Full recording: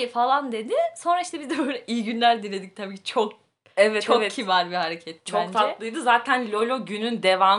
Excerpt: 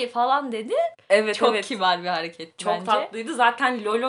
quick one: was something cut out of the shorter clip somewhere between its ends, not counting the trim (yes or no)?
yes